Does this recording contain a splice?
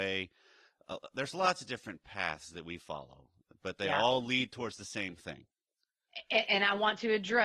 no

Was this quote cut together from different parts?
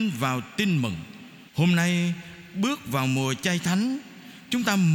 yes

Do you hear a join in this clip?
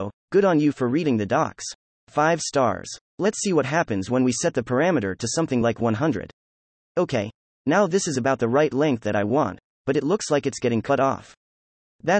no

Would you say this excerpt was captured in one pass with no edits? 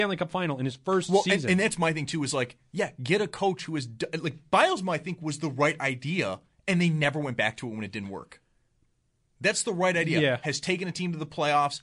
yes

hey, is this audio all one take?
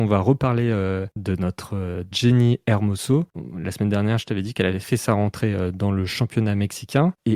no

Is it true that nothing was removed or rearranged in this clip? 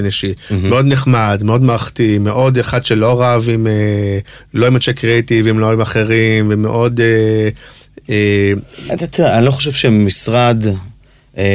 no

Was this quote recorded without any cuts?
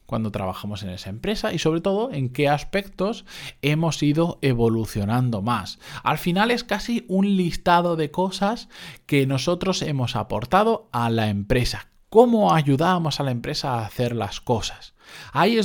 yes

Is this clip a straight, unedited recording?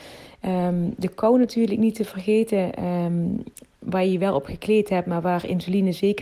no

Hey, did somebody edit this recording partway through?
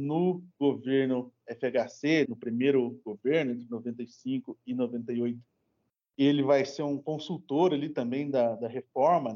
yes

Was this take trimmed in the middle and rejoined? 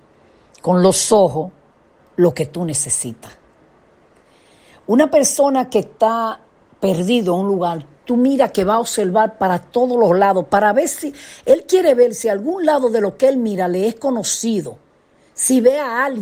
no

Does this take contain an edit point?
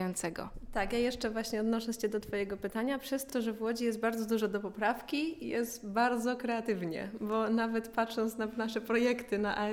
no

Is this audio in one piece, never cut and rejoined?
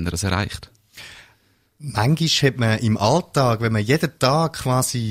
yes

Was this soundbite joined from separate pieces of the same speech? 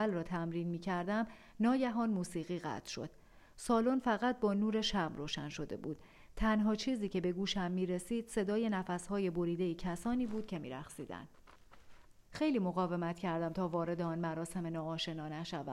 yes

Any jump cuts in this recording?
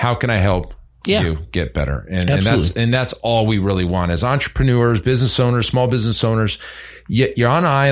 no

